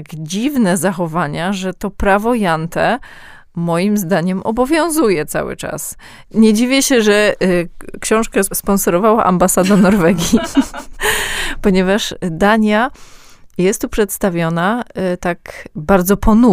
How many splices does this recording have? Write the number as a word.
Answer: one